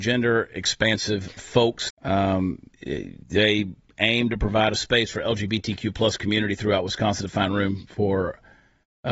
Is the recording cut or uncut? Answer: cut